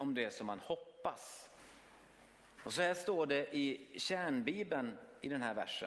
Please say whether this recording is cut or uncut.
cut